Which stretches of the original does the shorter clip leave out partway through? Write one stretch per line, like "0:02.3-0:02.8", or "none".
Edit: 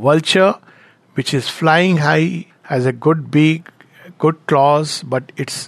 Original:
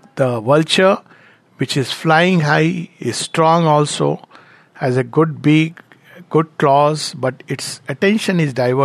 0:02.9-0:04.6